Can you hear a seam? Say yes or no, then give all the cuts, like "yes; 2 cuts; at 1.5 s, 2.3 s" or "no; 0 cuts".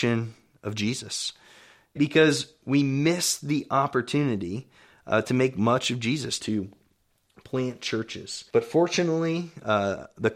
yes; 3 cuts; at 2.0 s, 6.4 s, 8.5 s